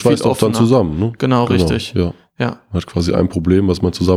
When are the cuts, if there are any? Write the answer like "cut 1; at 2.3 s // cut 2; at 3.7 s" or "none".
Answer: none